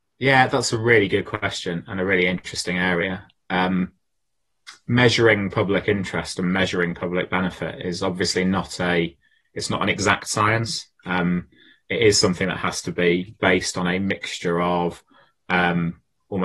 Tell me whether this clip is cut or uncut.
uncut